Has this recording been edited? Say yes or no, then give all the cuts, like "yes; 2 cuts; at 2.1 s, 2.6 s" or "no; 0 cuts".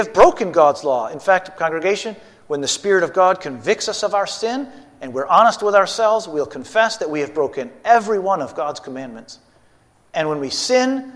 no; 0 cuts